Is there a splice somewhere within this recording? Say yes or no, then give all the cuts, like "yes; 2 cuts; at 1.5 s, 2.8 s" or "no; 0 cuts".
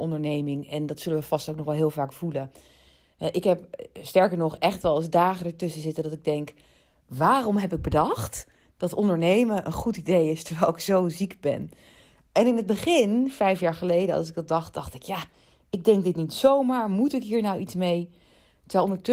no; 0 cuts